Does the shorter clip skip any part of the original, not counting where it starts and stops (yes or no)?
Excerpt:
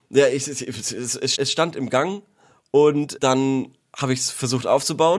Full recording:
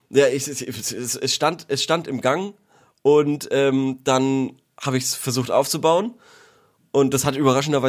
yes